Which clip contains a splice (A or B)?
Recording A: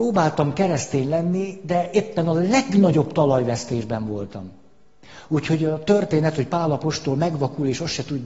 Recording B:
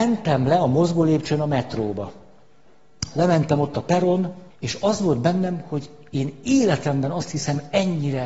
B